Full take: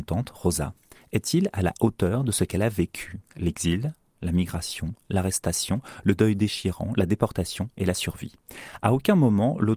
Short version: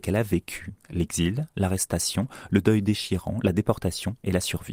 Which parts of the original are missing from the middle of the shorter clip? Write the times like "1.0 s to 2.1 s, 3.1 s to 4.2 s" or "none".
4.0 s to 5.1 s

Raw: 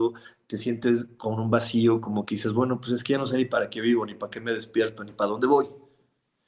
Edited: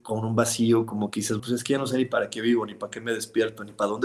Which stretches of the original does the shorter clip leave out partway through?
2.5 s to 2.8 s

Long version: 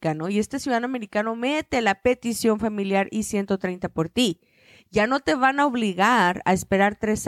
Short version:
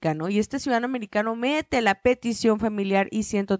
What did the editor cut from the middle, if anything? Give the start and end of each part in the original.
none

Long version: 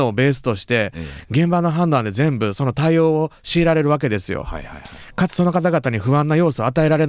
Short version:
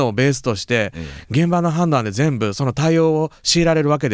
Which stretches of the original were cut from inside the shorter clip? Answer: none

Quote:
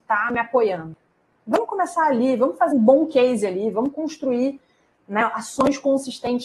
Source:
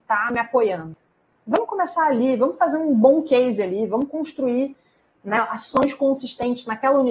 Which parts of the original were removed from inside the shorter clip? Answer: 2.7 s to 2.9 s

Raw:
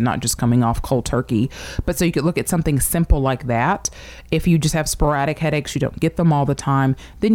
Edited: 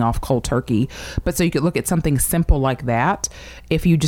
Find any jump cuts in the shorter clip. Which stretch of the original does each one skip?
none

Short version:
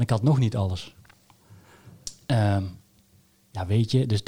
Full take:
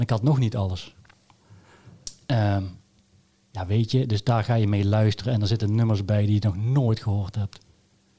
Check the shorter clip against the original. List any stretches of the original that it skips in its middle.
none

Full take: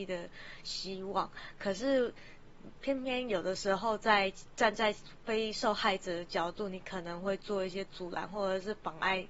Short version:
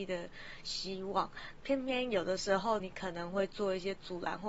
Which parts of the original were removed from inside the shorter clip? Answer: 1.6 s to 2.8 s, 4.0 s to 6.7 s

